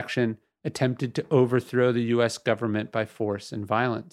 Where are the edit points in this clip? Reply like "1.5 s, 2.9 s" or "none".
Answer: none